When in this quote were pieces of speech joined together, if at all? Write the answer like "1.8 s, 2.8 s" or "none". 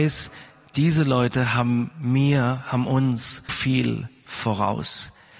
3.5 s